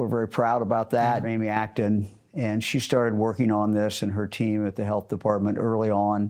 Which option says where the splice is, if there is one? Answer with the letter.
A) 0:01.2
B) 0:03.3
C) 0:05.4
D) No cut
A